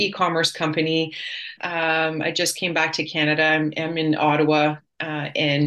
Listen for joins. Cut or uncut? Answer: cut